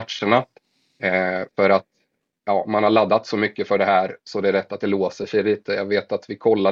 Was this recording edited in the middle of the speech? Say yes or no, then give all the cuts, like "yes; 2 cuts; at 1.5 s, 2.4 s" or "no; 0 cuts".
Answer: no; 0 cuts